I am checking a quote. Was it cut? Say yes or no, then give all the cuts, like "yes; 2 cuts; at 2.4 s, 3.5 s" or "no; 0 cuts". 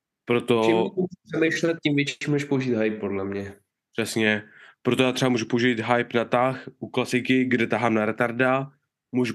no; 0 cuts